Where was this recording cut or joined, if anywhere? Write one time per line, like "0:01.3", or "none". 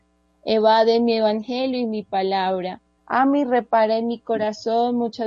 0:03.0